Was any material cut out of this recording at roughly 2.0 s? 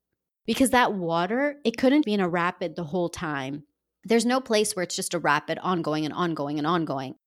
yes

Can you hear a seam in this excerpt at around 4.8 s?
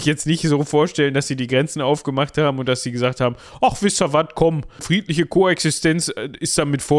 yes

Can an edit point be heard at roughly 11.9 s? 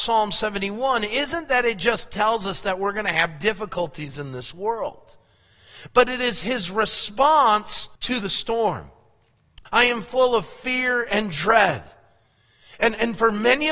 no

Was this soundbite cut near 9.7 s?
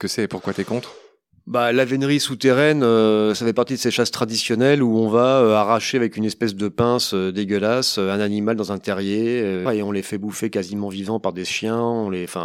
yes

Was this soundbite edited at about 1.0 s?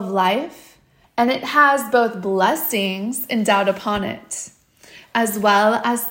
yes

